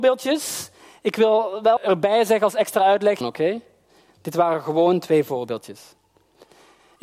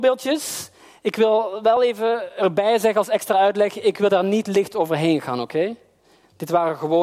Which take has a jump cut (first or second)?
first